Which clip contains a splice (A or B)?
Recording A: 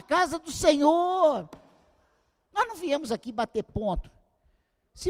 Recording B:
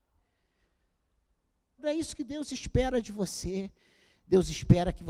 B